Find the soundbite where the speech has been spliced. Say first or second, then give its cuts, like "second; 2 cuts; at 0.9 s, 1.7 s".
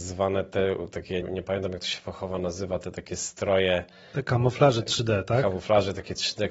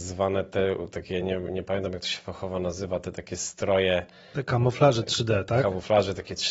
first; 1 cut; at 1.2 s